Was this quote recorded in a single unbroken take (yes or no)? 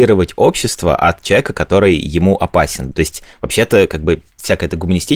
yes